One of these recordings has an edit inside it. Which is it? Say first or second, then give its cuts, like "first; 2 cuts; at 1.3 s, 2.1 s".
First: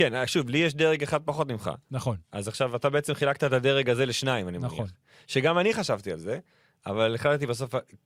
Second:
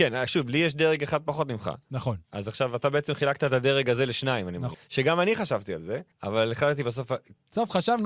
second; 2 cuts; at 4.7 s, 6.1 s